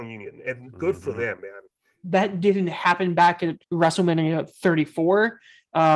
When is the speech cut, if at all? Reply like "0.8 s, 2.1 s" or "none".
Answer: 2.0 s, 3.6 s